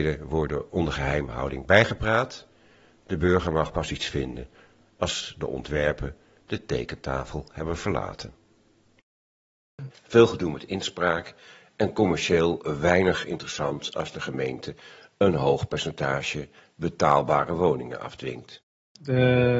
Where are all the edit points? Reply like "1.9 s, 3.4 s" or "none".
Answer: 9.9 s